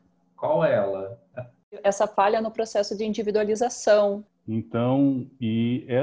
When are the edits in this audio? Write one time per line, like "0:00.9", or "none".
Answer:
0:01.3
0:04.3